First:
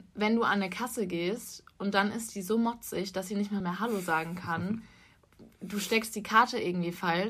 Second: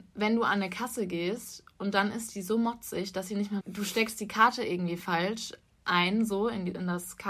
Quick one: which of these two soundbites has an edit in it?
second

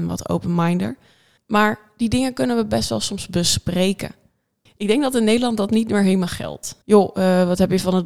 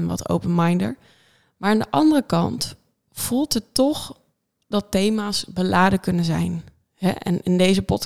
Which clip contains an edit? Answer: first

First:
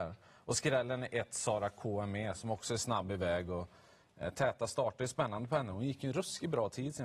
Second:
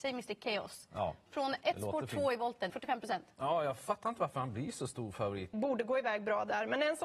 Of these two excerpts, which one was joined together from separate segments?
second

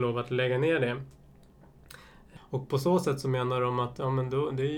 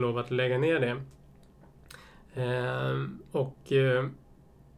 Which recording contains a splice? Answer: first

